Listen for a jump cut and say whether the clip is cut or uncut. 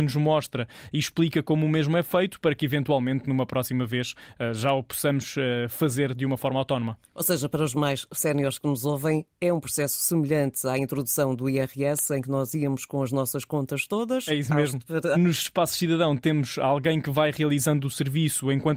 cut